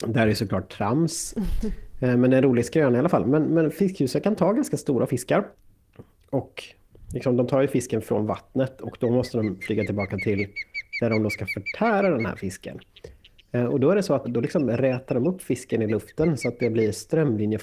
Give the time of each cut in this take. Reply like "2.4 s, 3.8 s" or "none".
14.2 s